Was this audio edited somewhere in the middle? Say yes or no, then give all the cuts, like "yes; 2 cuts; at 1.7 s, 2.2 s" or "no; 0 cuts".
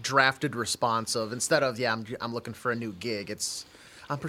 no; 0 cuts